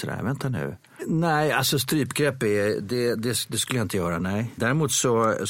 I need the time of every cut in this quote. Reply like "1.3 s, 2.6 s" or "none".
1.0 s, 4.6 s